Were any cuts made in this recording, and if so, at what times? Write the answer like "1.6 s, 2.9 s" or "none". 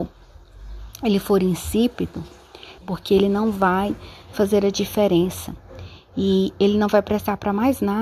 2.8 s